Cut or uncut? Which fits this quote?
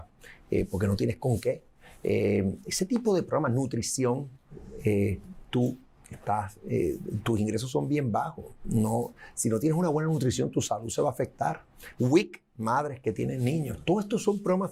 uncut